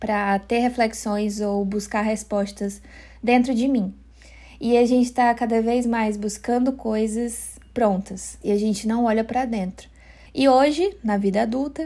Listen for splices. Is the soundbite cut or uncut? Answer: cut